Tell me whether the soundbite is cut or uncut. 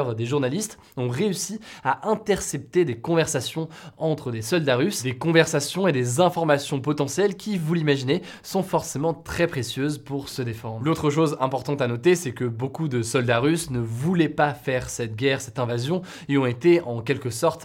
uncut